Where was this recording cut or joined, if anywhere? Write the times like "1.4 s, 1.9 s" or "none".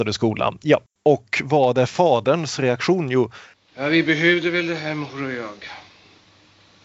1.0 s